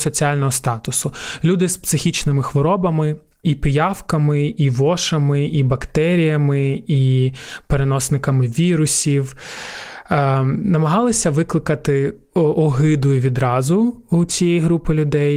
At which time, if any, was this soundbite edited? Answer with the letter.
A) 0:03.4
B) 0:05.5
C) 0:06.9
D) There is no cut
A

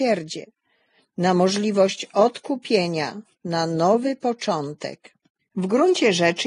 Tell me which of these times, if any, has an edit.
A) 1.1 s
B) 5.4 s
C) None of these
B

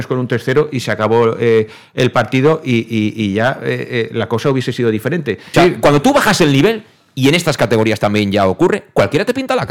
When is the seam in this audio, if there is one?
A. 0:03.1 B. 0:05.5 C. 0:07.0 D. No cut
B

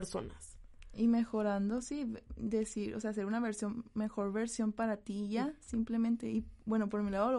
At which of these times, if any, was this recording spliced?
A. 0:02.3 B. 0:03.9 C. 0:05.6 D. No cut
D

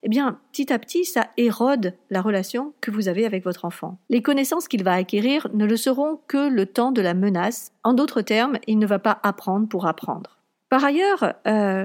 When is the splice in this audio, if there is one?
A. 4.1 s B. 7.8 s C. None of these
A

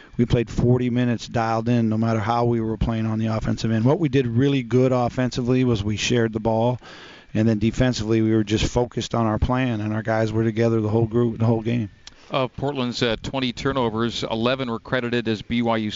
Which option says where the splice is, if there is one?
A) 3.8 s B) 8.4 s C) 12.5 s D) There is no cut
D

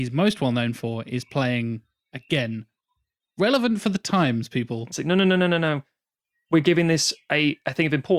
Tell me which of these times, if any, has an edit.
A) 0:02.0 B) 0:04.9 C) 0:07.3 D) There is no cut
B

